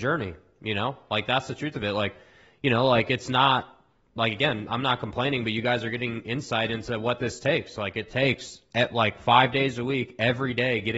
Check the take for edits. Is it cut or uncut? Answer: uncut